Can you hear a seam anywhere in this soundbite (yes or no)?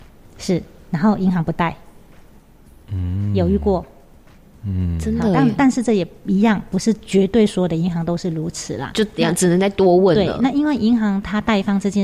no